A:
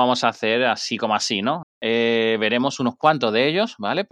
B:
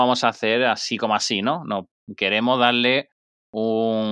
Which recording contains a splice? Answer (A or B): A